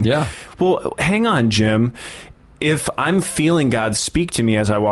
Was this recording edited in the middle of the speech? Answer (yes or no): no